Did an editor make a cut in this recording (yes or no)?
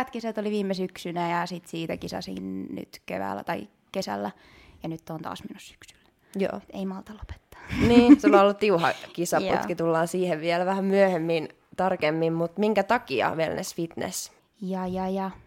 yes